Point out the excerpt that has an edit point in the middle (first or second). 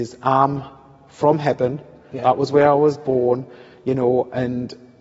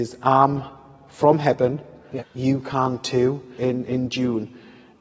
second